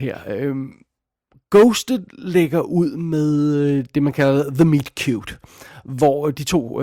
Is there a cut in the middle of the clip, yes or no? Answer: no